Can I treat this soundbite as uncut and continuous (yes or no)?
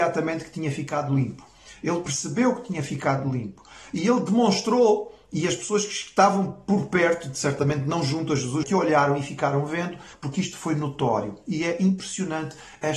no